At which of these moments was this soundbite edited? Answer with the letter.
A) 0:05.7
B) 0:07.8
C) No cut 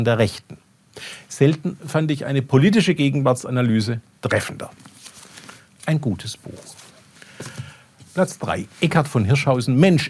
A